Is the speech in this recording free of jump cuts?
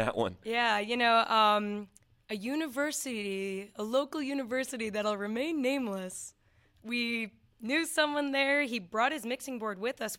yes; 0 cuts

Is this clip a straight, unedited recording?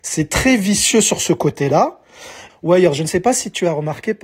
no; 1 cut; at 2.5 s

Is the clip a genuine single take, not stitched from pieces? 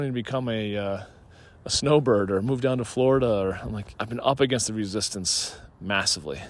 no; 1 cut; at 4.0 s

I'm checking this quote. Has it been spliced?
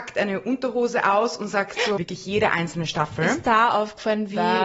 yes; 1 cut; at 2.0 s

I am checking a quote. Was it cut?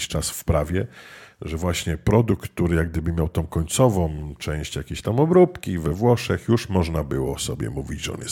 no; 0 cuts

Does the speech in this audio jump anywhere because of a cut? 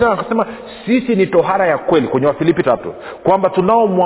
yes; 1 cut; at 2.6 s

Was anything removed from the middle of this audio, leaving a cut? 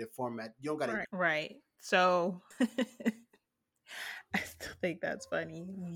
yes; 2 cuts; at 1.0 s, 2.5 s

